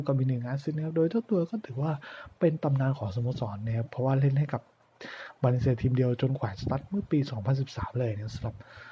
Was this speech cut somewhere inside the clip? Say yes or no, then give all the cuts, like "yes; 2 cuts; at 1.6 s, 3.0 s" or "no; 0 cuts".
no; 0 cuts